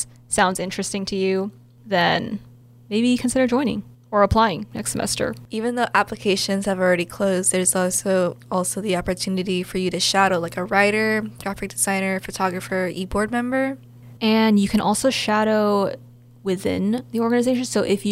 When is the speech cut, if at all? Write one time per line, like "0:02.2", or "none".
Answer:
0:14.2